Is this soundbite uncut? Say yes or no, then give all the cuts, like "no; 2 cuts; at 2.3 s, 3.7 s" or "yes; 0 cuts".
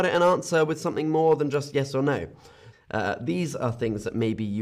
no; 1 cut; at 2.7 s